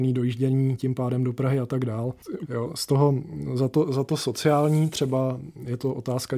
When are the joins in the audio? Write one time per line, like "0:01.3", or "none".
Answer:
0:02.4